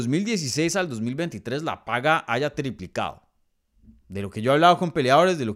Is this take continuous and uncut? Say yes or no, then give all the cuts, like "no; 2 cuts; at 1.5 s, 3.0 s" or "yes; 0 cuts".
yes; 0 cuts